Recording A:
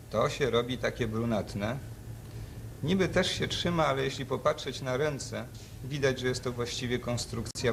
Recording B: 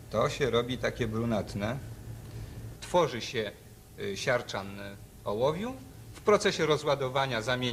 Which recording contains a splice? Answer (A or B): B